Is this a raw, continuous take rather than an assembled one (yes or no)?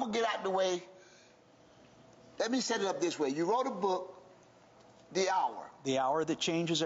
yes